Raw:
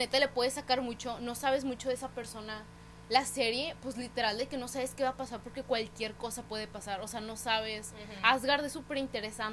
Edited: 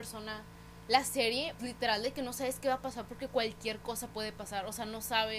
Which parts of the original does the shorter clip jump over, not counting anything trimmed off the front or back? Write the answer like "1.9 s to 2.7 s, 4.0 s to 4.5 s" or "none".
3.8 s to 3.9 s